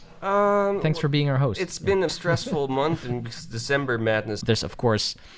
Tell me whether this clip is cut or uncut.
cut